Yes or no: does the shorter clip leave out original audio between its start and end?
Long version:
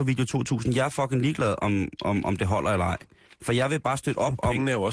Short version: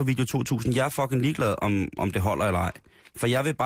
yes